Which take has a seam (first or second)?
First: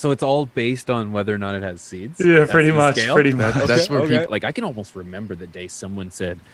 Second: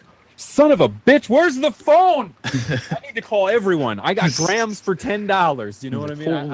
first